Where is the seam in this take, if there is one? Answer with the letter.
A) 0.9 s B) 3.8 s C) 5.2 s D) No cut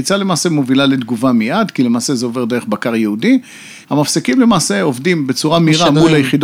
B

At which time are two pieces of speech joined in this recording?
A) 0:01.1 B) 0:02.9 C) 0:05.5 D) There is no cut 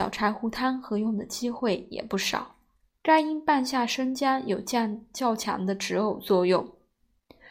B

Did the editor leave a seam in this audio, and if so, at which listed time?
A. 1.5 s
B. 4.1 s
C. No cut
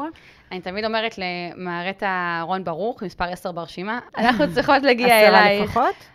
B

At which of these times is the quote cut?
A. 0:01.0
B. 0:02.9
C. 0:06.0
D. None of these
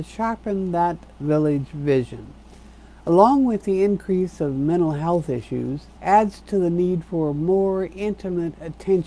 C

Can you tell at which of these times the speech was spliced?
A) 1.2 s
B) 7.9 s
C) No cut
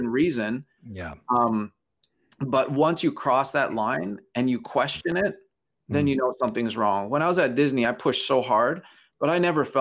C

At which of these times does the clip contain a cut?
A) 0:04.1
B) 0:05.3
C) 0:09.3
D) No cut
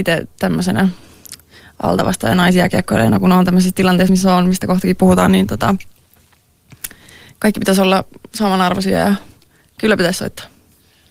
D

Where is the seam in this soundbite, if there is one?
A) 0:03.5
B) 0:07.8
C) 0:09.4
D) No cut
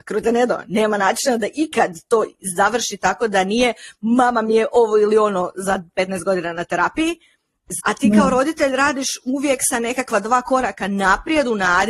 B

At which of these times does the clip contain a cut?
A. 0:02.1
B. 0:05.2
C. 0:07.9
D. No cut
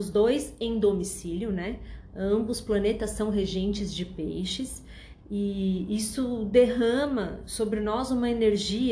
D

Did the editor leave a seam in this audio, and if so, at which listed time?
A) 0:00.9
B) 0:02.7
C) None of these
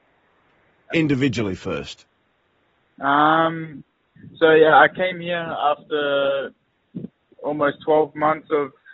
A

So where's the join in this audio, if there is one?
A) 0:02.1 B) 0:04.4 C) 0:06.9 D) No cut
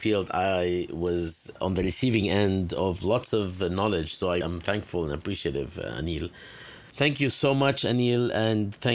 B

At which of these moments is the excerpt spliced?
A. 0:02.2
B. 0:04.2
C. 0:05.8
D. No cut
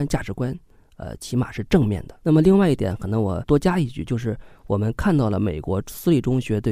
A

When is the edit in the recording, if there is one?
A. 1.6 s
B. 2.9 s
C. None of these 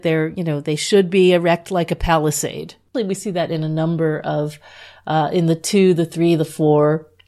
B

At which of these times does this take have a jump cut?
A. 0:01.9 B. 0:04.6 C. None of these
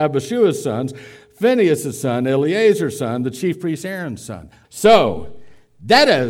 B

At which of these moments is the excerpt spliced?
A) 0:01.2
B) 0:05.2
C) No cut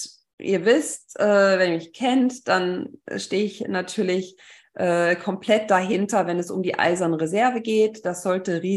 C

